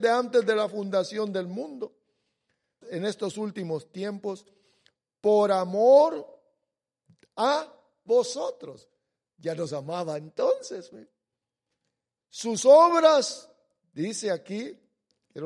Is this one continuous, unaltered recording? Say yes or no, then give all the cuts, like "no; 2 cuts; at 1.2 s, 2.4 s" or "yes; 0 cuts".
no; 2 cuts; at 2.8 s, 12.2 s